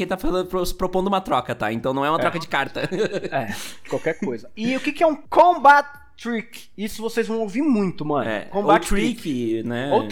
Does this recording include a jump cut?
no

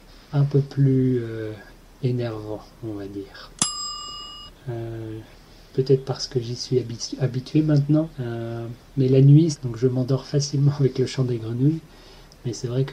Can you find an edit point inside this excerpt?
yes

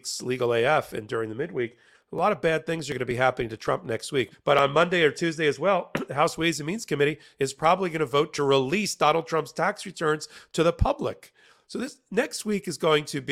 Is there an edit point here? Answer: yes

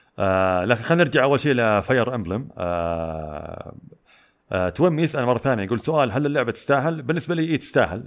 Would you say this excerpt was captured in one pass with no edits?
yes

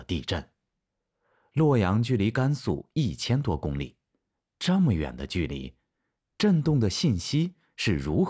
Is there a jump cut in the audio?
no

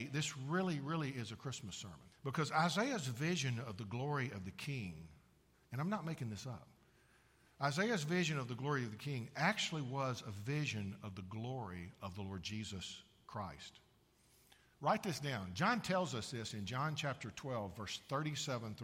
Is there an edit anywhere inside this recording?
yes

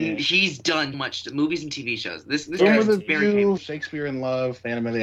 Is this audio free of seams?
no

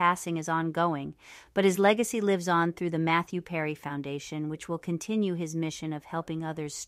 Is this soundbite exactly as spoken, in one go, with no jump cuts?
yes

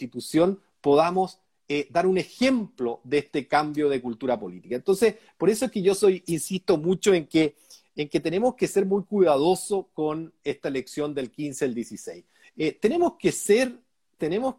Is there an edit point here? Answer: yes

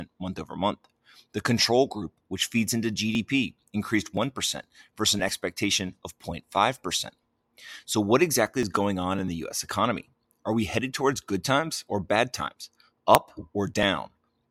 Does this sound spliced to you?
no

